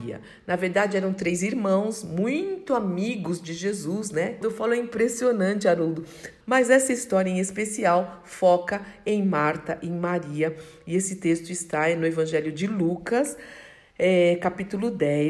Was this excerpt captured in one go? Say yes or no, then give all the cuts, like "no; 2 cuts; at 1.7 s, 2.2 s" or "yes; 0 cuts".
no; 2 cuts; at 4.4 s, 6.4 s